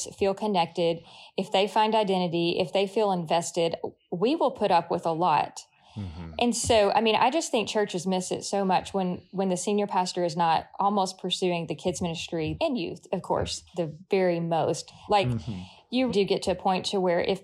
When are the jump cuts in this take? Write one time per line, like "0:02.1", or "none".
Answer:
0:15.1
0:16.1